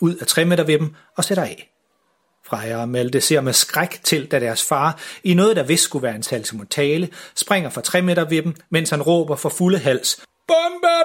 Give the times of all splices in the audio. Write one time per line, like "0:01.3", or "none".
none